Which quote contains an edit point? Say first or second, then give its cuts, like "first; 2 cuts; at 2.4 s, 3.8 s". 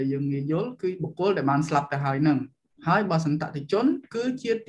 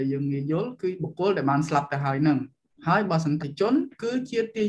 second; 1 cut; at 3.4 s